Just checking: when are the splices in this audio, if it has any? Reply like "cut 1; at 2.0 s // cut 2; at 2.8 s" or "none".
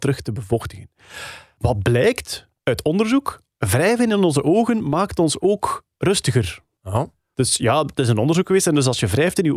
none

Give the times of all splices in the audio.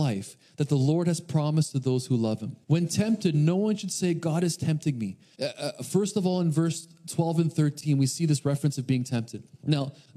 cut 1; at 2.6 s // cut 2; at 5.3 s

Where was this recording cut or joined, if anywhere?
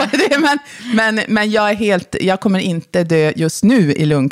none

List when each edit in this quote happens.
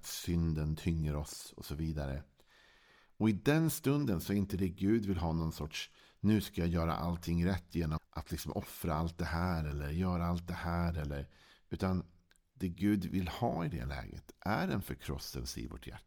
cut 1; at 8.0 s

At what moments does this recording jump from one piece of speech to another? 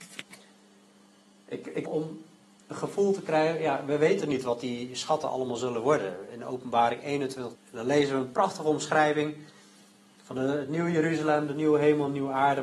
cut 1; at 1.8 s // cut 2; at 7.5 s

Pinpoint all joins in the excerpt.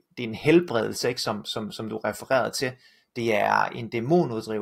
none

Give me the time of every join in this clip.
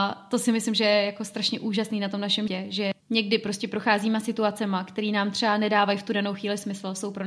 cut 1; at 2.5 s

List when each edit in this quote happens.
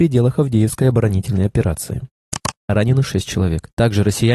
cut 1; at 2.6 s

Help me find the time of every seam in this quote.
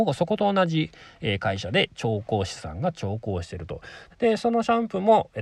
cut 1; at 4.1 s

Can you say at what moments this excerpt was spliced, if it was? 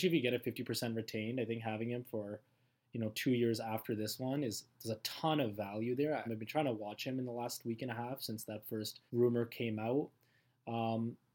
cut 1; at 6.3 s // cut 2; at 9.1 s

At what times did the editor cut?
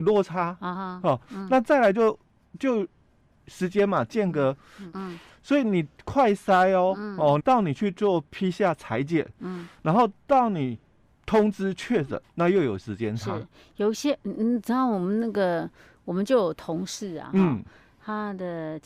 cut 1; at 4.9 s // cut 2; at 7.4 s // cut 3; at 12.2 s

